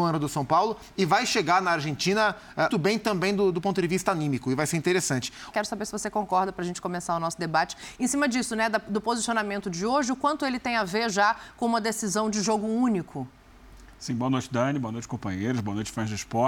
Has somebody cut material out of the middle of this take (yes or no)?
yes